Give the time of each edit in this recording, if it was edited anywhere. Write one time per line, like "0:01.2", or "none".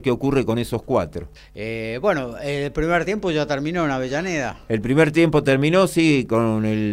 0:01.4